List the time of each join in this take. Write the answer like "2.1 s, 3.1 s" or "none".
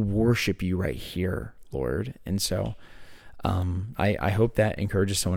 3.9 s